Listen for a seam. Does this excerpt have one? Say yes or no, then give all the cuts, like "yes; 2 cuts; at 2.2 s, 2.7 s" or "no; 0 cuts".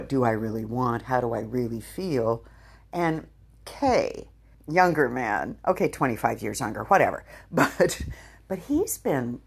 yes; 1 cut; at 4.5 s